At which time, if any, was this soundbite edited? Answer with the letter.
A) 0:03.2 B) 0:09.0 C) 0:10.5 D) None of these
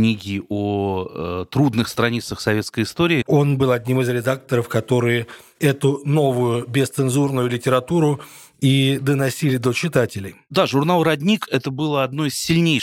A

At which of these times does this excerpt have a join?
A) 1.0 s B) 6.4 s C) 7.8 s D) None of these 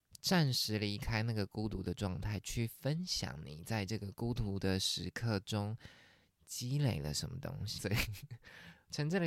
C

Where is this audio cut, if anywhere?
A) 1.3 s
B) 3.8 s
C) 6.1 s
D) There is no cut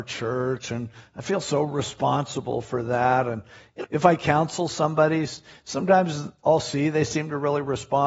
B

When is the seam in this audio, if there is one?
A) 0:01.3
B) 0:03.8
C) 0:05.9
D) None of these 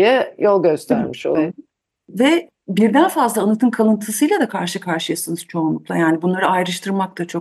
A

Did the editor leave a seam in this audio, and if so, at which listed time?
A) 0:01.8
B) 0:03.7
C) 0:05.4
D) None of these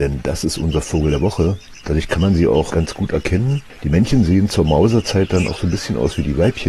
A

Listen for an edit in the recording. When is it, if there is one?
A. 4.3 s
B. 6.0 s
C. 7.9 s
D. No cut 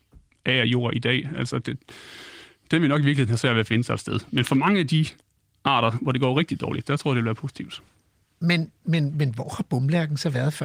D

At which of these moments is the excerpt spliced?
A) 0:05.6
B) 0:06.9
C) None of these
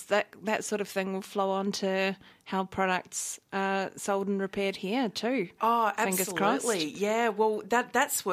C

